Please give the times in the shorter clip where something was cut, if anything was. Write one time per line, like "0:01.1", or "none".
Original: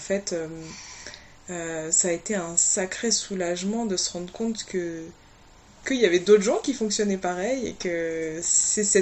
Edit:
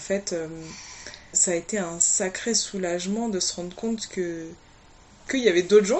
0:01.3